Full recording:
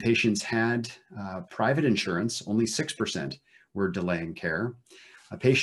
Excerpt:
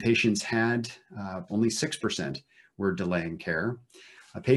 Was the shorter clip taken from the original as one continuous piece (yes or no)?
no